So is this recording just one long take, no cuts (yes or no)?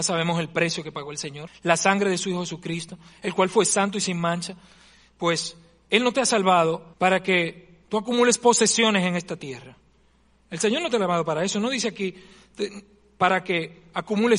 no